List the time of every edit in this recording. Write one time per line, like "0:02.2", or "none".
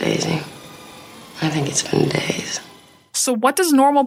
none